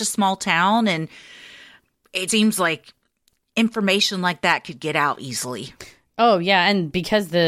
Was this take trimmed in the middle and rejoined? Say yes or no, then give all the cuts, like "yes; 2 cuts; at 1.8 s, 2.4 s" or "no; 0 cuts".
yes; 1 cut; at 2.3 s